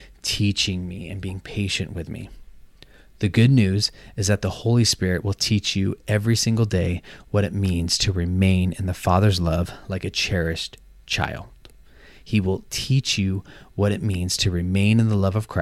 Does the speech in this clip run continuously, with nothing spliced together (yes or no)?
yes